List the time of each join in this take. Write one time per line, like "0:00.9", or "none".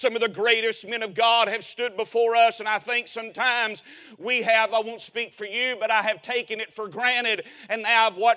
0:04.7